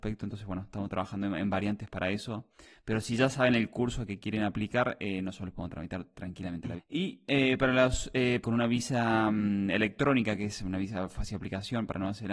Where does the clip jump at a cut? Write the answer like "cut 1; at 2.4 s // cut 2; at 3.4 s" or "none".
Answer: cut 1; at 6.8 s // cut 2; at 8.4 s